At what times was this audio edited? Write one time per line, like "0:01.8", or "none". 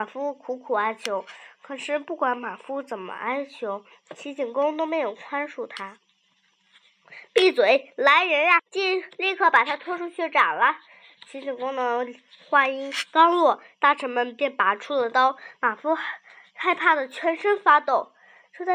0:08.6